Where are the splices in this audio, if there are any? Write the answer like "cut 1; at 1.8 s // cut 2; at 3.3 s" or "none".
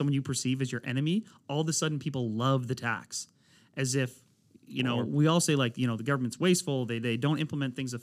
none